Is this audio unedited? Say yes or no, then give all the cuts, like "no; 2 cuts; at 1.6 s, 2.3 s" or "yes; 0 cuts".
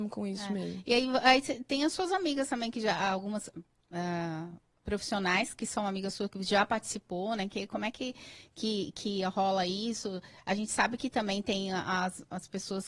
yes; 0 cuts